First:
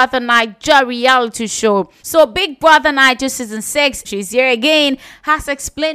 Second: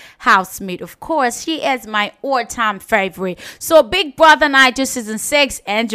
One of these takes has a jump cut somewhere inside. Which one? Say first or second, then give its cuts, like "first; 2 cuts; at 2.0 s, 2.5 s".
first; 2 cuts; at 2.0 s, 4.0 s